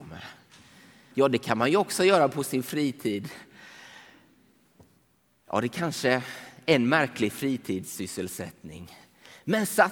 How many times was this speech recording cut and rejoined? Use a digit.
1